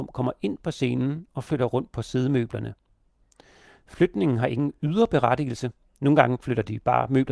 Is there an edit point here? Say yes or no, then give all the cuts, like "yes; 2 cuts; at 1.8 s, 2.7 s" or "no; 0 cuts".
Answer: no; 0 cuts